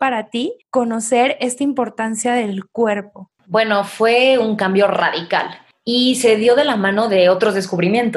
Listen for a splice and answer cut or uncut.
uncut